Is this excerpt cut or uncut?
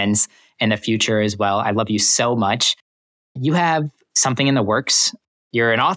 uncut